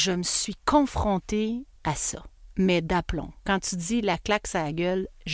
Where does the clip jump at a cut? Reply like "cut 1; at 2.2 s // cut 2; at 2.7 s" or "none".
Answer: cut 1; at 1.8 s